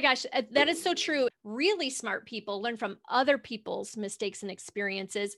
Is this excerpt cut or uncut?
cut